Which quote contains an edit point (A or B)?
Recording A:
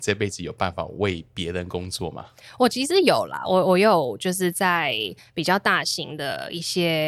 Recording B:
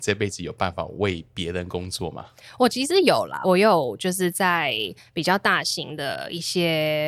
B